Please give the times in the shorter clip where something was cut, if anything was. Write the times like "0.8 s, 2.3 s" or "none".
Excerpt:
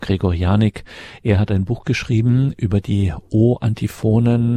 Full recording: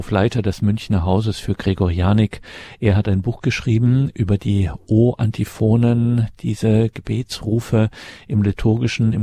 none